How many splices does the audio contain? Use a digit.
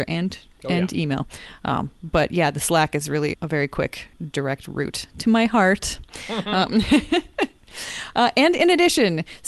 1